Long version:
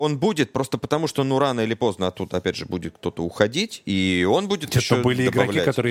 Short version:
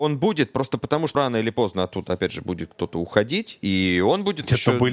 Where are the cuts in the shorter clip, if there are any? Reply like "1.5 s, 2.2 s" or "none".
1.1 s